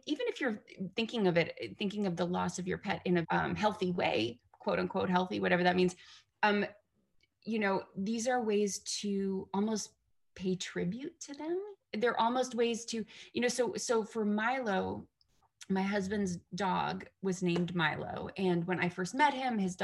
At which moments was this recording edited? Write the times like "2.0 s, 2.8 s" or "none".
3.2 s